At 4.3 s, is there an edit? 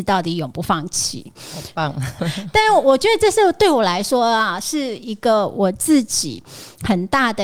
no; 1 cut; at 2.2 s

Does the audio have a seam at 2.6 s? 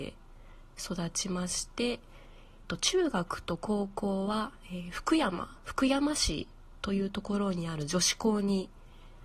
yes; 1 cut; at 2.6 s

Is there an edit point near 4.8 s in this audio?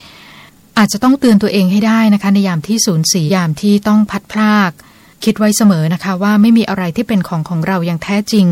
no; 1 cut; at 3.3 s

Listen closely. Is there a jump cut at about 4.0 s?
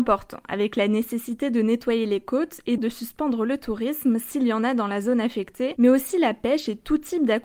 no; 1 cut; at 2.8 s

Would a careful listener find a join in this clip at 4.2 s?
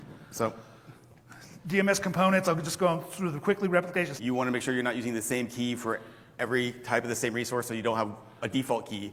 yes; 1 cut; at 4.2 s

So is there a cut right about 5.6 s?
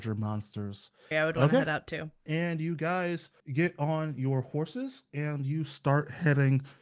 no; 2 cuts; at 1.1 s, 3.4 s

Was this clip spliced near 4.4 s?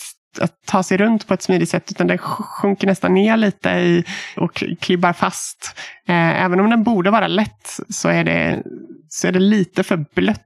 yes; 1 cut; at 4.4 s

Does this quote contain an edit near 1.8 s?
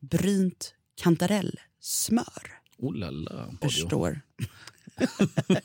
no; 1 cut; at 3.6 s

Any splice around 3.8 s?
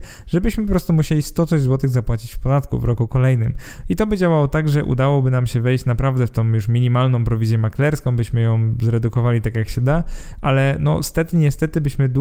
yes; 1 cut; at 3.8 s

